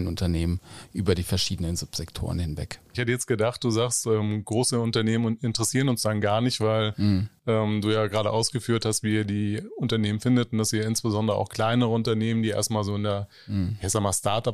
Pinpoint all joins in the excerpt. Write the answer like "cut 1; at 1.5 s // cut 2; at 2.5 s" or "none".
cut 1; at 2.9 s